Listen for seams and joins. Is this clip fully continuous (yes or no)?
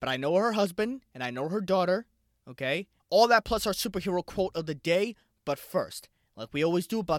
no